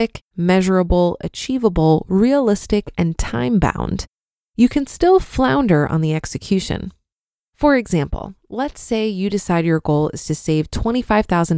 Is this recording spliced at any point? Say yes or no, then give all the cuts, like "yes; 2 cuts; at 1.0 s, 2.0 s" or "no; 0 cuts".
no; 0 cuts